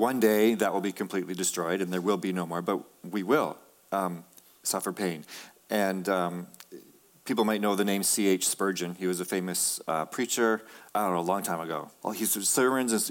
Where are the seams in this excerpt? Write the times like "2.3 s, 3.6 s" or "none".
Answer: 10.9 s, 12.0 s